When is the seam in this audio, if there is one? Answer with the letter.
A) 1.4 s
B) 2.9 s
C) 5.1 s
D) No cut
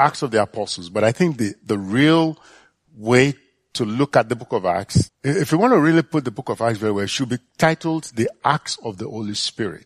C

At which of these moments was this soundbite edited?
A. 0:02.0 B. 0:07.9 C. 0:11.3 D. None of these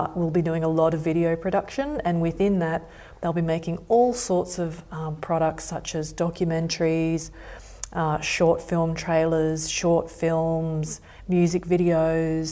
D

